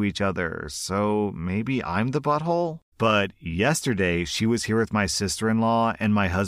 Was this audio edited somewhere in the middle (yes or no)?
yes